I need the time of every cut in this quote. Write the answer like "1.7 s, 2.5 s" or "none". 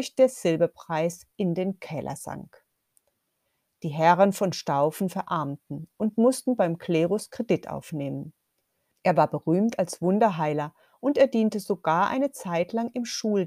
8.9 s